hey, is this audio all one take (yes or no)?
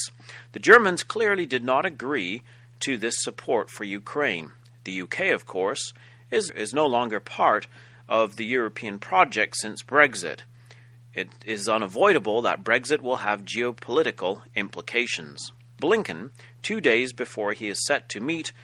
no